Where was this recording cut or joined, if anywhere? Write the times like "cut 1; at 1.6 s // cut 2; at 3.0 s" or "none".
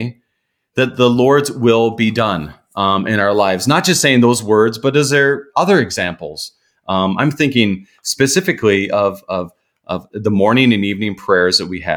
none